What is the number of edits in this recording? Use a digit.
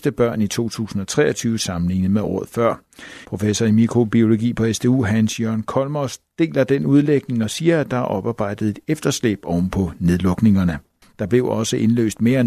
2